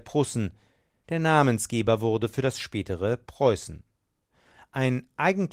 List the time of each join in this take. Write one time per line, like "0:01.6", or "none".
0:01.0

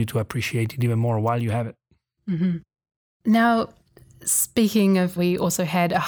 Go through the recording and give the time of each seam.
0:05.2

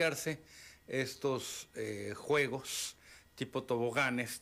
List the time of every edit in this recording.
none

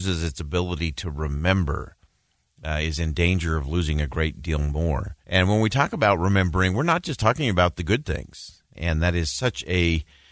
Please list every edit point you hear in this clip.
0:05.2
0:08.7

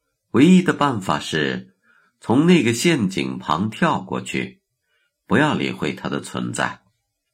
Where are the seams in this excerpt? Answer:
none

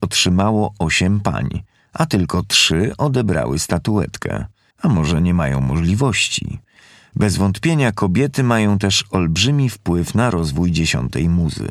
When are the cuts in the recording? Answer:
0:04.7

